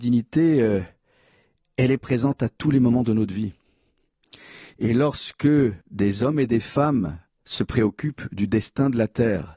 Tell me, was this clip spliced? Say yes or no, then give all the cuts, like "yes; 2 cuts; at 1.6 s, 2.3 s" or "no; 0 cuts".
yes; 1 cut; at 5.8 s